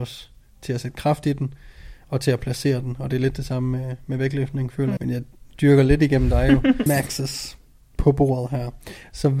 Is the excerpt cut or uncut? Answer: cut